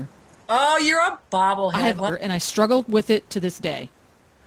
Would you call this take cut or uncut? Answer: cut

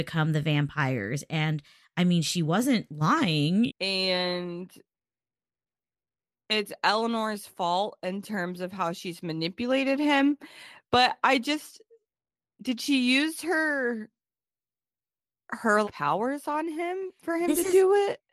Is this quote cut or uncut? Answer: cut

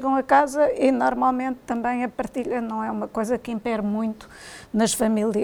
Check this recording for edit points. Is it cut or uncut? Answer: uncut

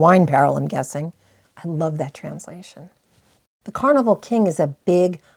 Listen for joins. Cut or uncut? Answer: cut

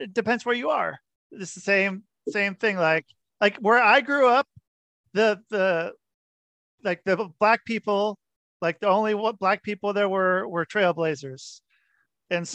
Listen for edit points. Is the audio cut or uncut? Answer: uncut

